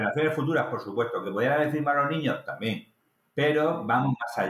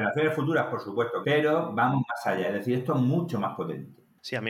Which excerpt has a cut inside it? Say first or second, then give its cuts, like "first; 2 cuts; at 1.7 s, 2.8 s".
second; 1 cut; at 1.2 s